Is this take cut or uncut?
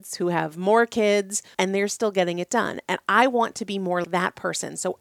cut